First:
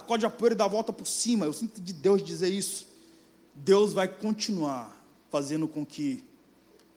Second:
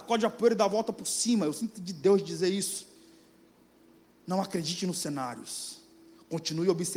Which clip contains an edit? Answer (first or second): first